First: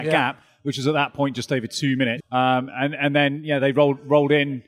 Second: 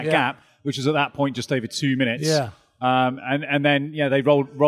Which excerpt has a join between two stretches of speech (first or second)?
first